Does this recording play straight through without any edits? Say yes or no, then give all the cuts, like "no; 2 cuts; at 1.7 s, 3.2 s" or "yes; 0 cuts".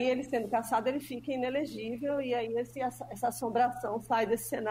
yes; 0 cuts